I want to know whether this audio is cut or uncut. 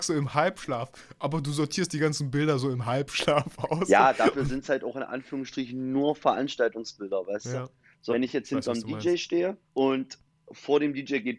cut